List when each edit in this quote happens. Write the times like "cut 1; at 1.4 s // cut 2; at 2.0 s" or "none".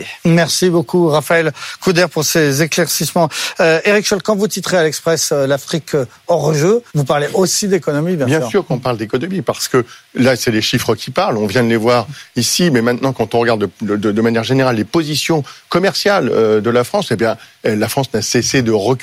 cut 1; at 6.9 s